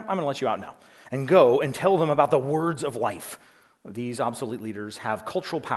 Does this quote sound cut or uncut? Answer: uncut